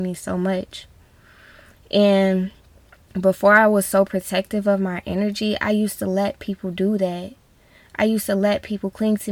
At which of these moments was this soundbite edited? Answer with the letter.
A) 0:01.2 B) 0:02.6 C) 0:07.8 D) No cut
D